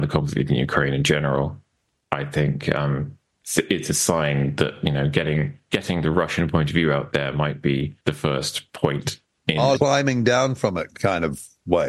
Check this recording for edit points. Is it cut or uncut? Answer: cut